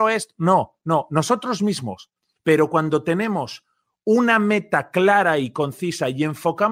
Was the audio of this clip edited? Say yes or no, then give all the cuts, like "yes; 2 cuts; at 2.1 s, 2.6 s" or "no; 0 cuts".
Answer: yes; 1 cut; at 2.4 s